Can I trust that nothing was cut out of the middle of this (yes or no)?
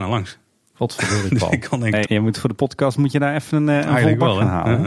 no